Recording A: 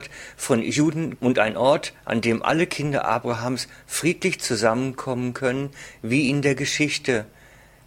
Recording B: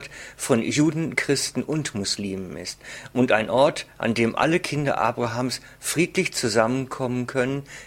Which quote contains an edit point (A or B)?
A